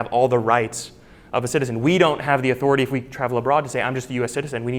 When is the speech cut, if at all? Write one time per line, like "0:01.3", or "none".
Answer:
none